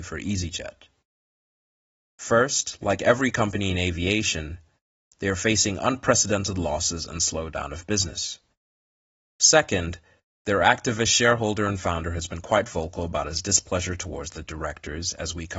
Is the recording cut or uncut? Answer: uncut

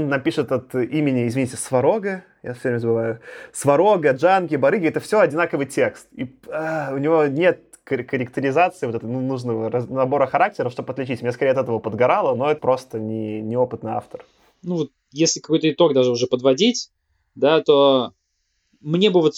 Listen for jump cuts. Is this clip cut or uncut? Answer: cut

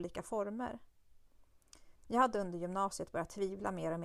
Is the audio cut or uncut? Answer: cut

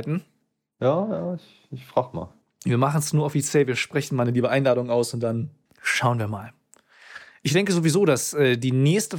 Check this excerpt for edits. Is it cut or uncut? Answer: uncut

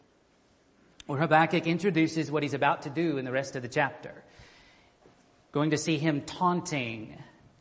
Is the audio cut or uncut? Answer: uncut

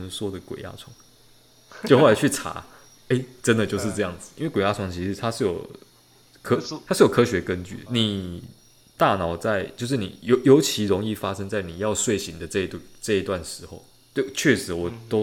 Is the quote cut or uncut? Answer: cut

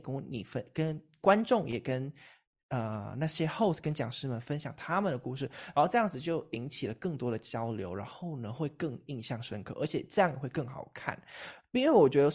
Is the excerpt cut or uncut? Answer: uncut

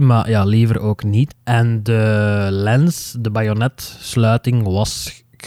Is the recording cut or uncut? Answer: cut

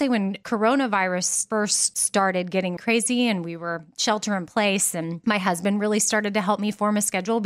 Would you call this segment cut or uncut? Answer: cut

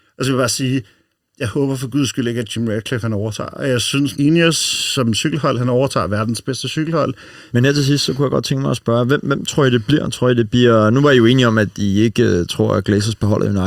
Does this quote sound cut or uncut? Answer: cut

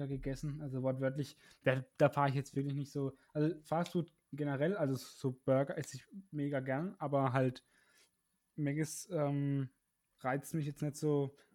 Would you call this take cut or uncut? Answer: uncut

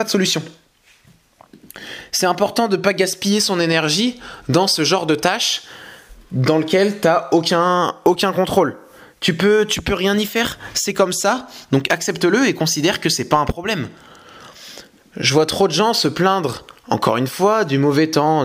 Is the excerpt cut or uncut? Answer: uncut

